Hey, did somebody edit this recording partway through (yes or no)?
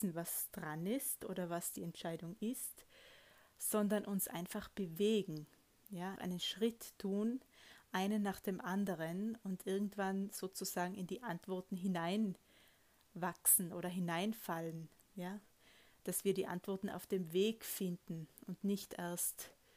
yes